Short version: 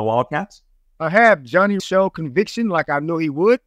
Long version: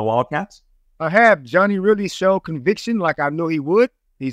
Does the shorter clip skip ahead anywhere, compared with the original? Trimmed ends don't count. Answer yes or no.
yes